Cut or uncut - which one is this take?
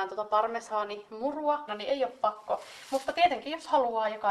cut